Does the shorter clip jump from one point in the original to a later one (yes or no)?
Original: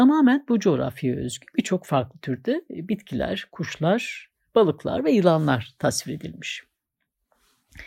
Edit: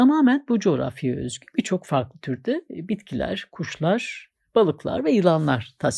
no